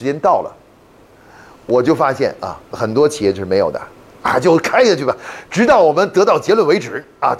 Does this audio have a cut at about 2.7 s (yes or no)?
yes